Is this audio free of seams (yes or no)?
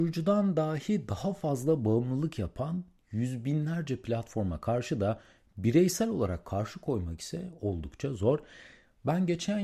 yes